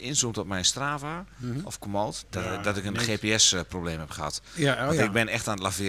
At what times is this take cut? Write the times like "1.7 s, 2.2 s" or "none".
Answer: 2.2 s